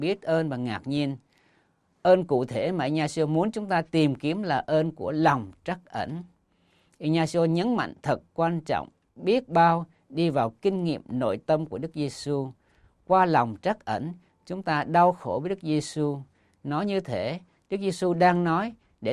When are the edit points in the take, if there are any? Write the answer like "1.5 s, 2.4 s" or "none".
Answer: none